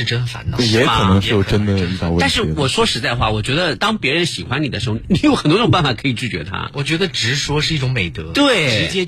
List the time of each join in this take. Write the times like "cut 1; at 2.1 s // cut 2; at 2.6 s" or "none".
cut 1; at 3.8 s // cut 2; at 4.9 s